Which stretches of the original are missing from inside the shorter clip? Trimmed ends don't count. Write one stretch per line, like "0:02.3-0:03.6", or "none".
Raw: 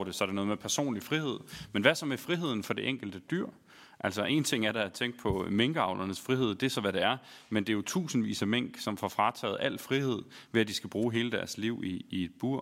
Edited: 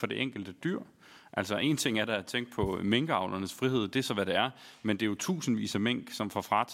none